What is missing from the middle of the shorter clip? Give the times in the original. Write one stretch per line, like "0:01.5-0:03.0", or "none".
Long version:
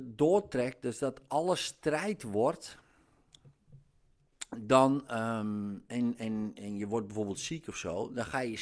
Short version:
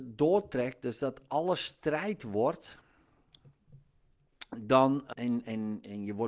0:05.1-0:05.9

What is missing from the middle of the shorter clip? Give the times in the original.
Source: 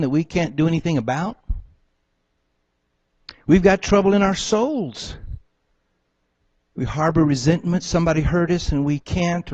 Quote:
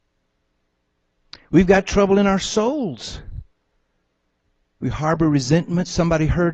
none

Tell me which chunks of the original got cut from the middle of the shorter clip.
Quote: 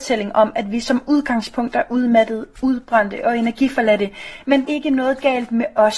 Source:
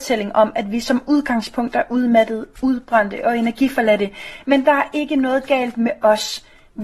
0:04.7-0:04.9

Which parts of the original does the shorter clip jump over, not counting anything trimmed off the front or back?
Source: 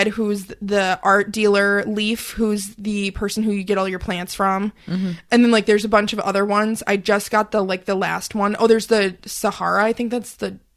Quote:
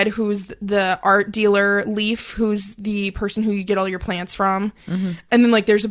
none

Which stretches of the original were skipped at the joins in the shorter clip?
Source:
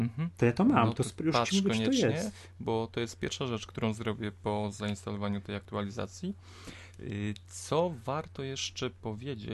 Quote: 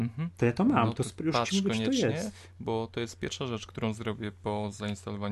none

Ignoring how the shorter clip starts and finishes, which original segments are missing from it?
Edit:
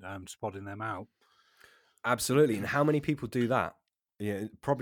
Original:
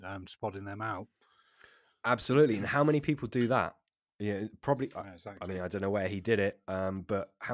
none

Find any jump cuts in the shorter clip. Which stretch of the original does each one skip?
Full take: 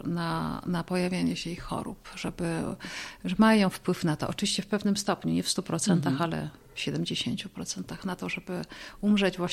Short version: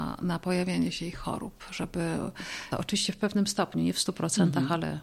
0:03.2-0:04.2

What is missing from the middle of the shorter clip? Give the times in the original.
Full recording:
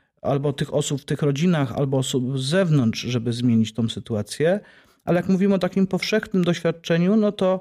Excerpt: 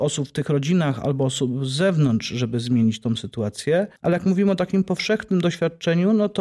0:04.7-0:05.0

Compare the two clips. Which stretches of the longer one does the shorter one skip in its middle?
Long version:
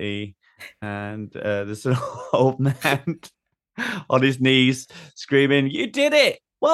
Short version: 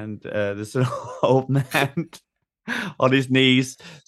none

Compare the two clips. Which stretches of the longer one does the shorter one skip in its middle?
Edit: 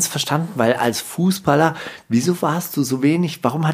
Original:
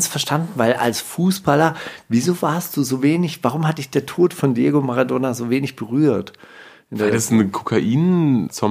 none

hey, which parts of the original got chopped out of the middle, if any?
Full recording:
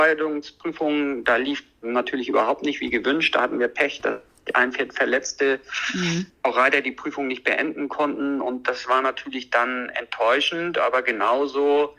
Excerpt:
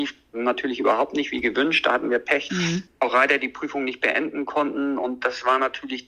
0:04.0-0:05.9

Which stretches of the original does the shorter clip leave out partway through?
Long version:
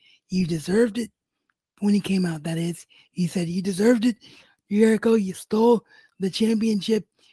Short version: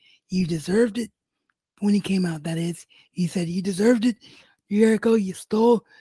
none

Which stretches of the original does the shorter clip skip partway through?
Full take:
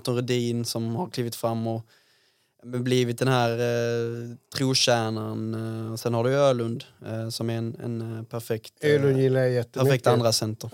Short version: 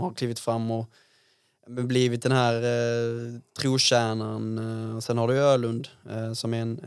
none

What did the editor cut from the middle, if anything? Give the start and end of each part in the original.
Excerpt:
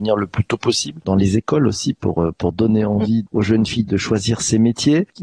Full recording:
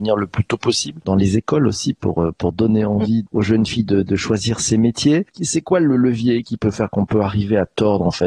0:03.8-0:04.0

